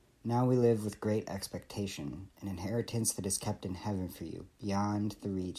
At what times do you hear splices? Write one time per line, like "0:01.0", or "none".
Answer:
0:02.3
0:04.5